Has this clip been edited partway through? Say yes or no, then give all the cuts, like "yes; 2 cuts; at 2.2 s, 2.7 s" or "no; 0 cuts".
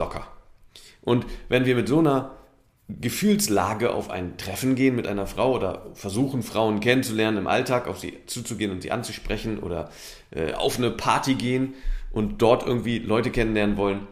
no; 0 cuts